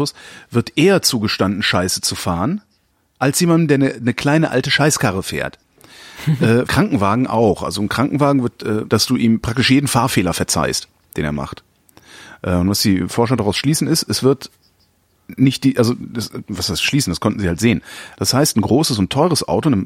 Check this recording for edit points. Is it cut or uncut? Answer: cut